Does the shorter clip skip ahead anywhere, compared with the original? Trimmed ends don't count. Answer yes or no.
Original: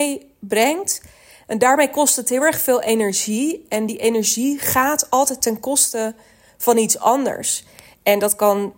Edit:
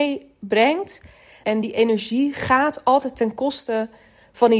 yes